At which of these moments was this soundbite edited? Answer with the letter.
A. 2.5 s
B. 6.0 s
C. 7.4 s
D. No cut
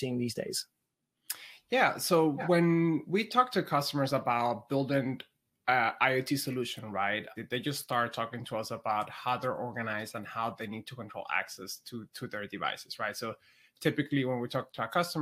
C